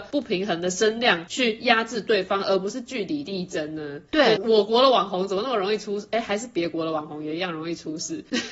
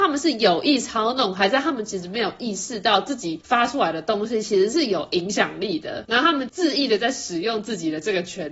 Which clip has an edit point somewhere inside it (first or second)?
first